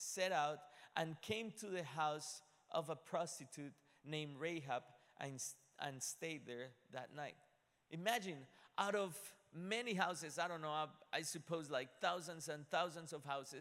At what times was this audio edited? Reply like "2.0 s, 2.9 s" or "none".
none

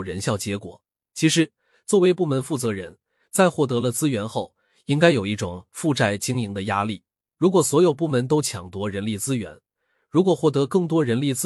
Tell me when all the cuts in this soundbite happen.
7.2 s

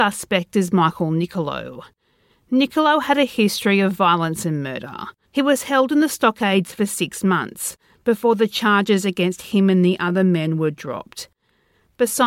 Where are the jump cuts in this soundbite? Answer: 5.2 s

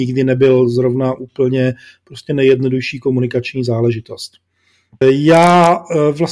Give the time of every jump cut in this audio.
5.0 s

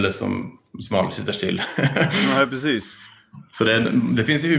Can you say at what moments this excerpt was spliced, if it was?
none

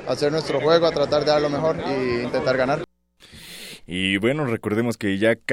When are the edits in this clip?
3.8 s

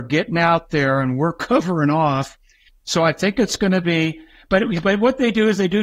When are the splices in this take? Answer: 2.7 s

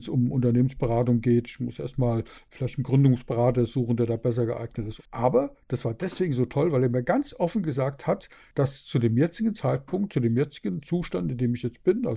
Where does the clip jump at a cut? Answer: 5.0 s

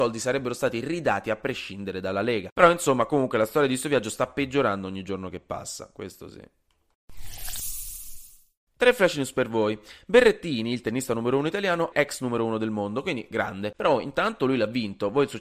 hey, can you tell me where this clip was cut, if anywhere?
11.9 s, 13.7 s

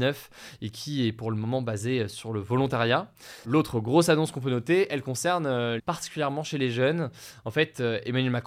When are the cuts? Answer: 3.4 s, 5.8 s

